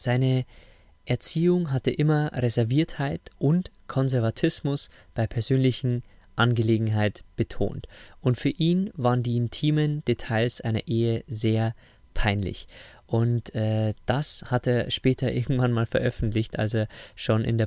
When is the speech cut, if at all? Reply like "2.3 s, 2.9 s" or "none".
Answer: none